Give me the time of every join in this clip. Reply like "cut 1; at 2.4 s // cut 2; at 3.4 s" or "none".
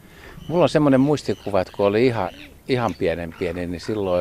none

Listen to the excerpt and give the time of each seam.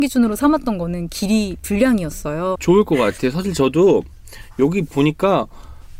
cut 1; at 2.6 s

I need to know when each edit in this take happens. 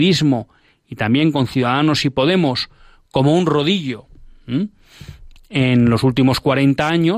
none

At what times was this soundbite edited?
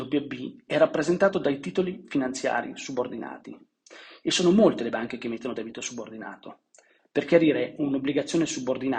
none

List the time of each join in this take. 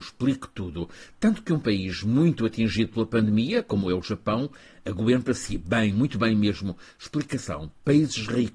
none

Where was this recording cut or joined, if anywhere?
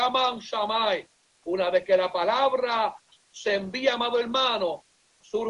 cut 1; at 1.3 s

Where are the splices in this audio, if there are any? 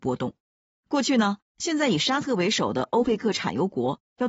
cut 1; at 1.5 s

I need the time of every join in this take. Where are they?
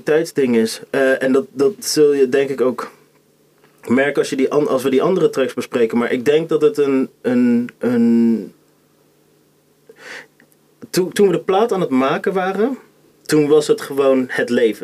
cut 1; at 7.8 s

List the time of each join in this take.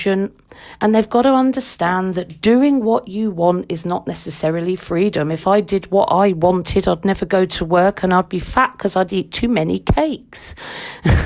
none

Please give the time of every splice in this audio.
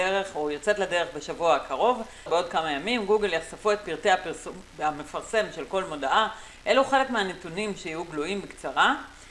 cut 1; at 2.3 s

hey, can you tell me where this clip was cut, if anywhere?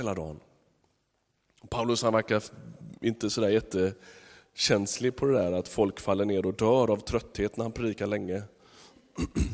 none

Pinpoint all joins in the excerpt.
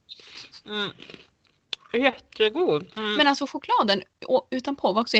cut 1; at 2.9 s

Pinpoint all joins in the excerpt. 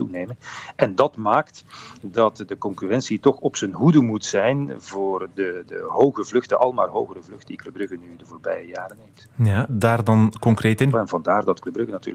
cut 1; at 9.7 s // cut 2; at 10.9 s

